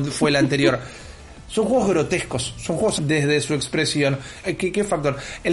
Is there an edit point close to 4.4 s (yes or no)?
yes